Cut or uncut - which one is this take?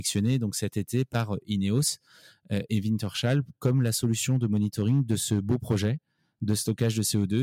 uncut